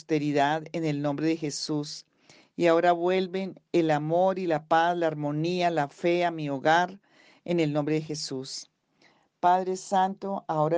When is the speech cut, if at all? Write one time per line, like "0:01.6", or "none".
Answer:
none